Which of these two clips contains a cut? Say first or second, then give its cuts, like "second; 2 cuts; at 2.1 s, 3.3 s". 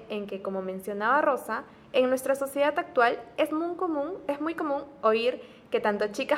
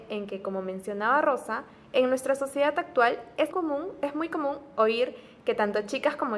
second; 1 cut; at 3.5 s